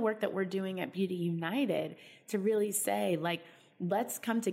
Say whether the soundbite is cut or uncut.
uncut